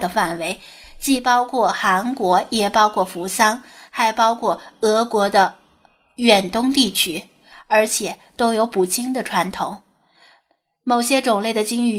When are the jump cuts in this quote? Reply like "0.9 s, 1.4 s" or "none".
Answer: 7.5 s

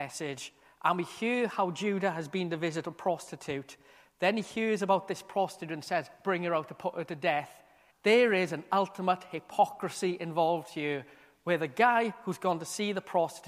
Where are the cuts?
7.9 s

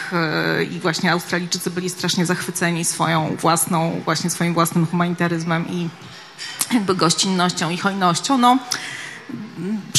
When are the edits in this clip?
none

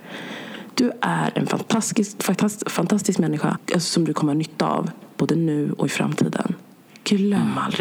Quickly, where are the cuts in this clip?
3.6 s

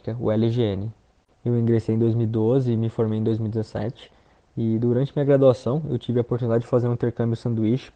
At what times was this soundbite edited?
1.3 s

